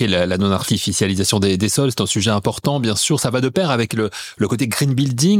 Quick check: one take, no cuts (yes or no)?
yes